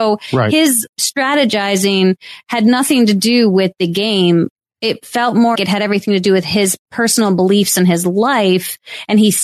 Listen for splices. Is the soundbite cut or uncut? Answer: cut